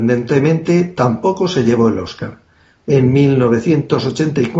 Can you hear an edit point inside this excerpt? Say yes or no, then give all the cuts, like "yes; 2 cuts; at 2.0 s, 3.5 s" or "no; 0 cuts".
yes; 1 cut; at 2.8 s